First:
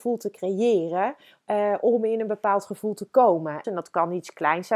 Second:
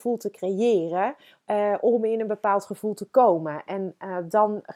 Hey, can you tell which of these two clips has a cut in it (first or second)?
first